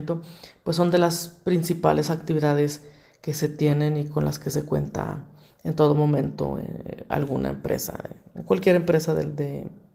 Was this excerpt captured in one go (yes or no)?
yes